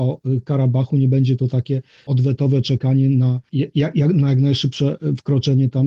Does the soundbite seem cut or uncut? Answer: uncut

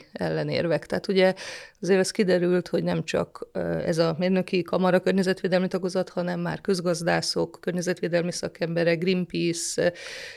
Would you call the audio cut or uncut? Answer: uncut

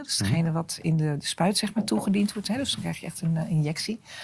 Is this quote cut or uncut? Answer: uncut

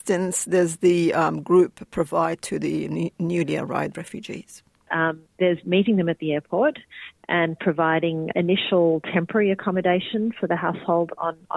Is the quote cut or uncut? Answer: cut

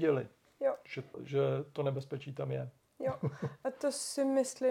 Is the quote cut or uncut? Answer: cut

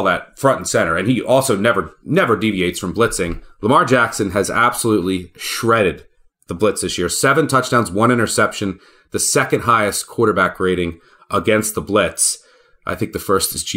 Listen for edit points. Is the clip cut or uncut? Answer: uncut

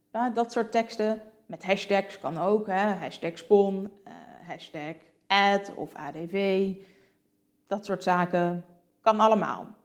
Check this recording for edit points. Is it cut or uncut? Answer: uncut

